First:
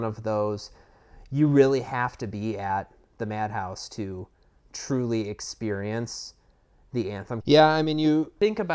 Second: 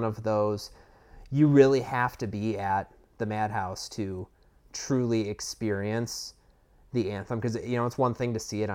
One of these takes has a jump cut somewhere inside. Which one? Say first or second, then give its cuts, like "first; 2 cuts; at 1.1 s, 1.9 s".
first; 1 cut; at 7.4 s